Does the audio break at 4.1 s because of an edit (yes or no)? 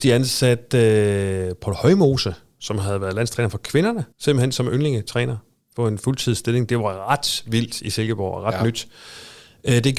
yes